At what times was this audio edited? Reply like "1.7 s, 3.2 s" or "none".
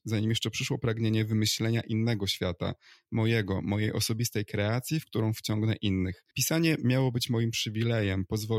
6.3 s

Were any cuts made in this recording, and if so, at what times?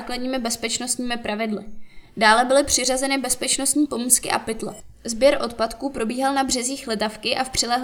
none

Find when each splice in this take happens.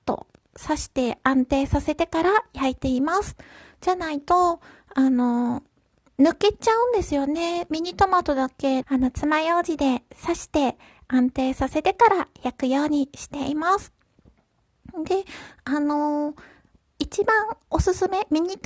8.8 s

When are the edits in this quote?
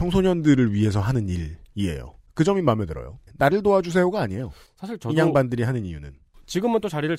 none

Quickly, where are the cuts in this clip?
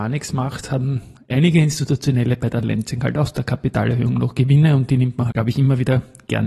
5.3 s

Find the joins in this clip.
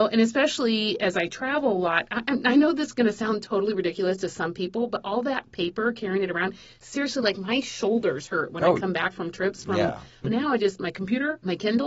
10.2 s

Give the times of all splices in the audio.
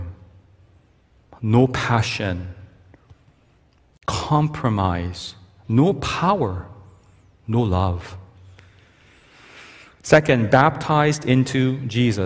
none

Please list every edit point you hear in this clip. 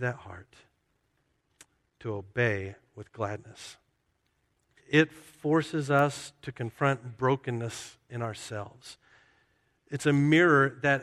4.8 s

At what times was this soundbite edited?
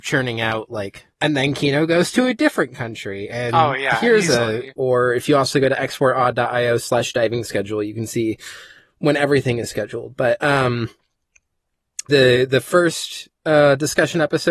1.1 s, 4.7 s, 12.1 s

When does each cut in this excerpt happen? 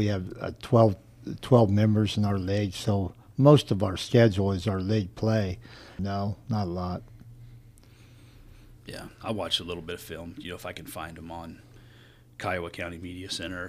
6.0 s

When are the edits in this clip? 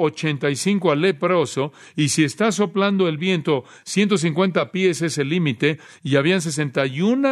none

